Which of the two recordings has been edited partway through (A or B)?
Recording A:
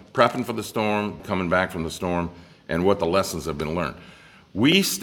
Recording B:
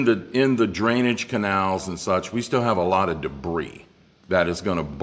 A